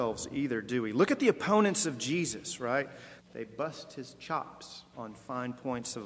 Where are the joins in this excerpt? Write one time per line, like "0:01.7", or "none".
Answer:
0:03.2